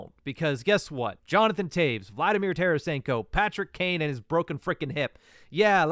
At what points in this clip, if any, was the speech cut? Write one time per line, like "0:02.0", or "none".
0:01.2